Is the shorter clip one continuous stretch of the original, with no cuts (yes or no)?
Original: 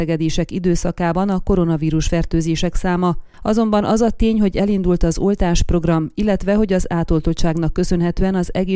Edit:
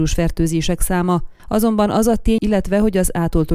no